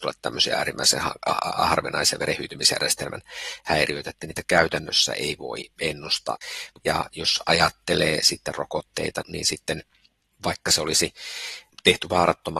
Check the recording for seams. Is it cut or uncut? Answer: cut